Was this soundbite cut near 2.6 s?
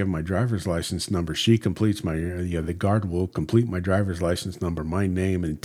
no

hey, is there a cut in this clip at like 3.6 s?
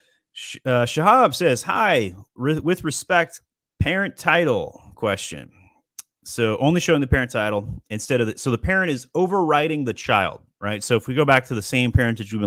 yes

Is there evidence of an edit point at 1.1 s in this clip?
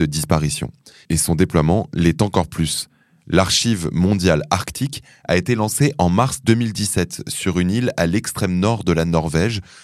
no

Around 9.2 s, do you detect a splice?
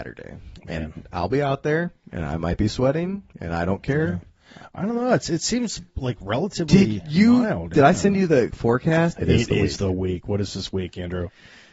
yes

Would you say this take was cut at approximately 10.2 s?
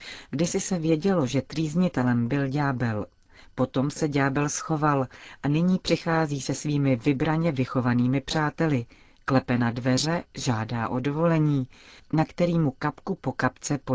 no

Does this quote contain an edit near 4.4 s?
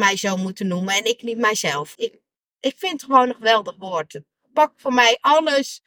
no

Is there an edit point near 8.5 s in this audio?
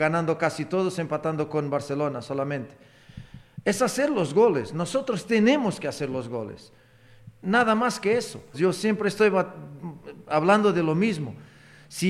yes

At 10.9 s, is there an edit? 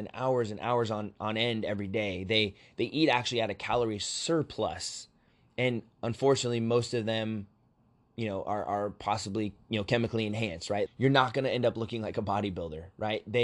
yes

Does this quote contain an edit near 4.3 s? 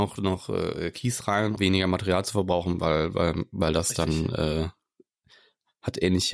no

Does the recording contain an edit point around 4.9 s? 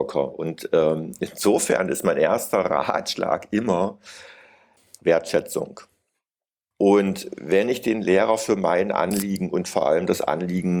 no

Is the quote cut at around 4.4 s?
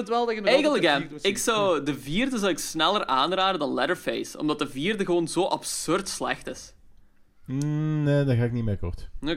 no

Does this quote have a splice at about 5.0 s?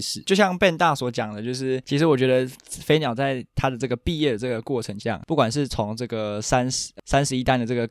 yes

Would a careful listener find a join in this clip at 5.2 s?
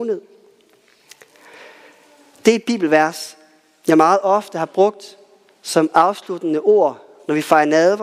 no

